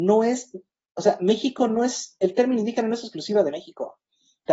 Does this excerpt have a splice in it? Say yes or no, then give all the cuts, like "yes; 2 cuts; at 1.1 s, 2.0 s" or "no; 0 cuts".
no; 0 cuts